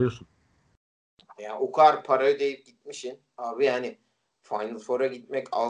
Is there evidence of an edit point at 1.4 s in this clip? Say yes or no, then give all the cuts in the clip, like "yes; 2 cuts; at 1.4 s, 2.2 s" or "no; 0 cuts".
yes; 1 cut; at 1.4 s